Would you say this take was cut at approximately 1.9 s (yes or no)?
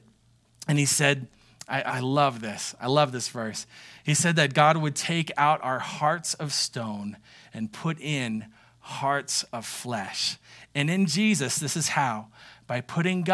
yes